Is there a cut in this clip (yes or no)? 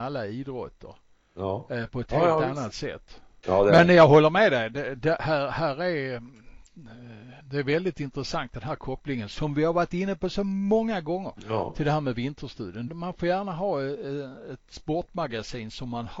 yes